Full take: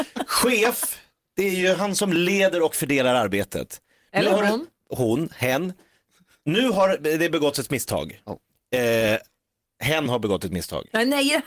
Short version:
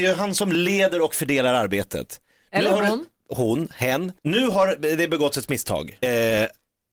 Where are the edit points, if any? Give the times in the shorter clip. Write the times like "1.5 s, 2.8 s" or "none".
4.2 s, 6.0 s